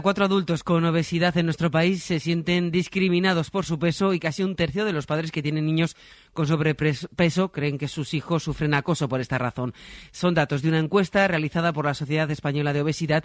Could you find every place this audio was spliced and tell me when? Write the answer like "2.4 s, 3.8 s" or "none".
none